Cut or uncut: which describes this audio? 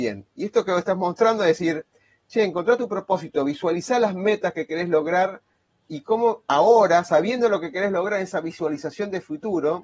uncut